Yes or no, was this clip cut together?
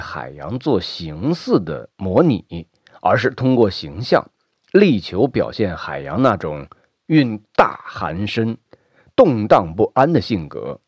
no